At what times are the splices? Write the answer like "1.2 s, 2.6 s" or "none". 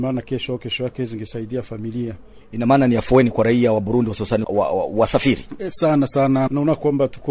4.4 s

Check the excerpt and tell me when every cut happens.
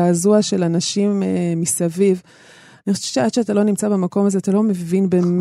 none

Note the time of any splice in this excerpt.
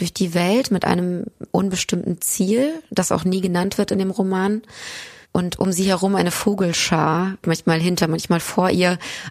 5.2 s, 7.4 s

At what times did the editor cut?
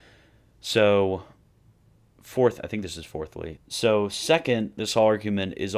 3.6 s

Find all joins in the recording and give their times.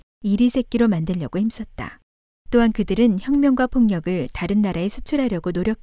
none

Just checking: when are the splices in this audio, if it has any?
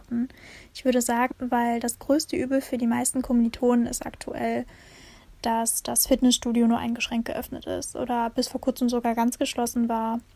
1.3 s

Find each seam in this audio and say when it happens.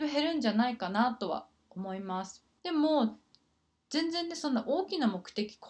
2.6 s

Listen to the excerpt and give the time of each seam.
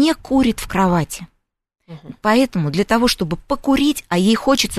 none

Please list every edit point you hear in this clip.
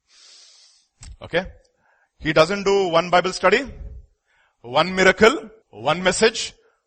5.6 s

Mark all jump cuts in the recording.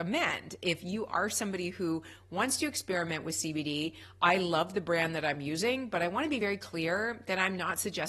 none

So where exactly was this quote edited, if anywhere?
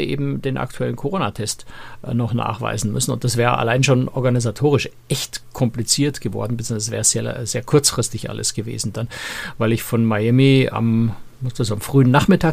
none

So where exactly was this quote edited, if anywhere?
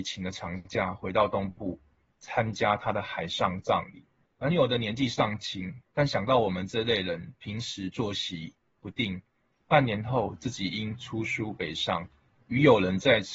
4.2 s, 9.6 s

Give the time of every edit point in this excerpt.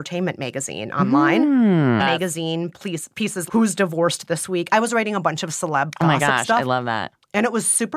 2.0 s, 3.5 s

